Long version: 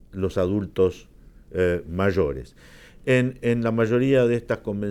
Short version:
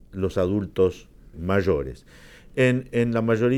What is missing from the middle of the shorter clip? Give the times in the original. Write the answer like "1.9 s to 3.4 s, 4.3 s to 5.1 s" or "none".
1.3 s to 1.8 s